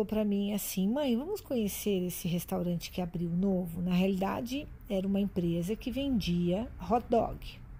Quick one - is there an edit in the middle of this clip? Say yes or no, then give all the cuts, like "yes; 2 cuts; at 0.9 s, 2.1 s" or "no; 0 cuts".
no; 0 cuts